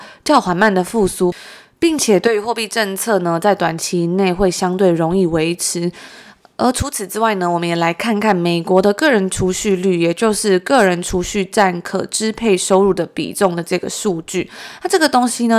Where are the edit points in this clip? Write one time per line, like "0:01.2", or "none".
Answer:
none